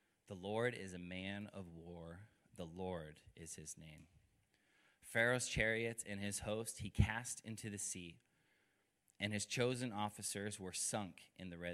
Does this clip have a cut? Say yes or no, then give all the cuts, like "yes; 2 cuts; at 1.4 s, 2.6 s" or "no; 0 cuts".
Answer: no; 0 cuts